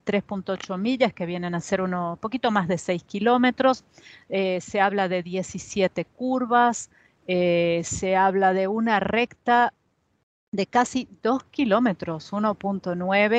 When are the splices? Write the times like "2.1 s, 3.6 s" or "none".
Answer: none